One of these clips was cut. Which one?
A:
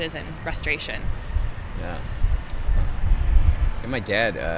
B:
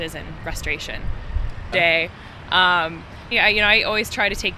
B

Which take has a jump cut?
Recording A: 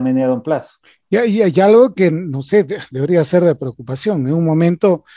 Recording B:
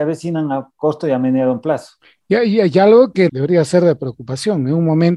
B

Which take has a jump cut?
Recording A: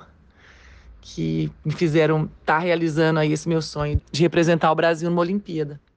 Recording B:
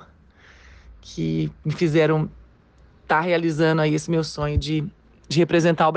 A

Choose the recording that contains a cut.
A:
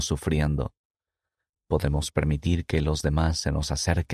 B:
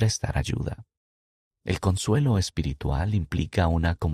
B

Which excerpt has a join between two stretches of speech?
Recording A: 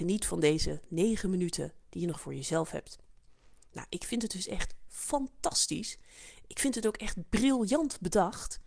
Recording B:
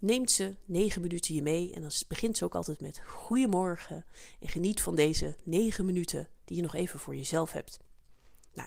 A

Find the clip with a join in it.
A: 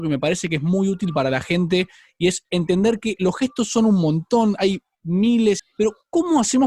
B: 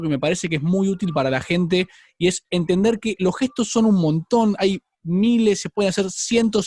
A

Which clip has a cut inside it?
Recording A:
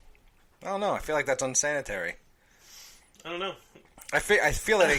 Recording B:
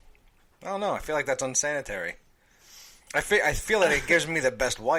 B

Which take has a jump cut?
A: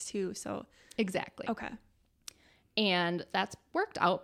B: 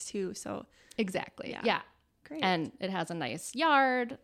A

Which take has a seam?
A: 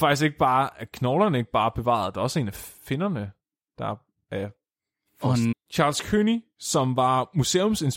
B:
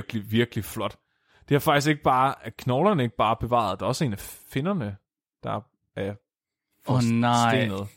A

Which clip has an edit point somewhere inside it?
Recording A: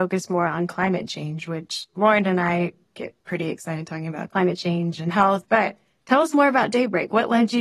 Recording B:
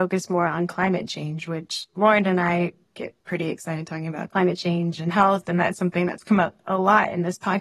A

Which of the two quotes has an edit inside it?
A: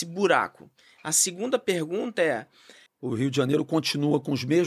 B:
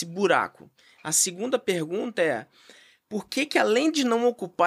A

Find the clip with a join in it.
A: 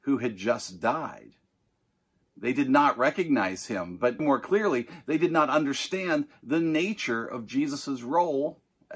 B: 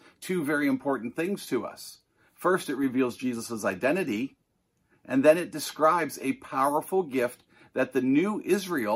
A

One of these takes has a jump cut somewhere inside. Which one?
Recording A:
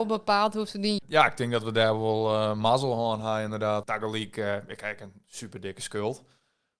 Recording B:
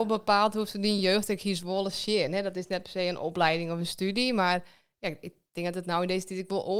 A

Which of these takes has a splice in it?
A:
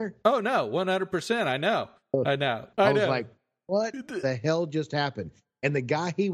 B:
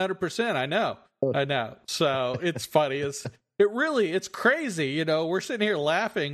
A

